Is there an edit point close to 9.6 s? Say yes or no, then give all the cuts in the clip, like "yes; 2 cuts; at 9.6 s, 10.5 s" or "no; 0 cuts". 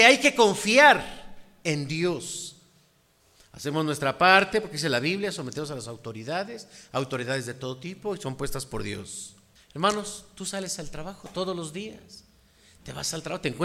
yes; 1 cut; at 9.6 s